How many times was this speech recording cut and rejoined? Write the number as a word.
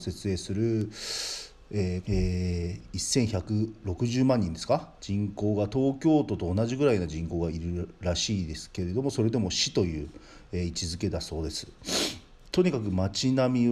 three